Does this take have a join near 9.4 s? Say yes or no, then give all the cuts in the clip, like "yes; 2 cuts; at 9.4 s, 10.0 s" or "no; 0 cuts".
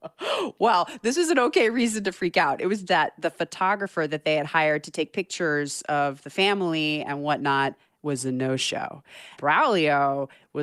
yes; 2 cuts; at 2.9 s, 9.4 s